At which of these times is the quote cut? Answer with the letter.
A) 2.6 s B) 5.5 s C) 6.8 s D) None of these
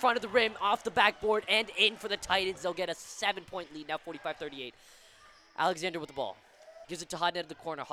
C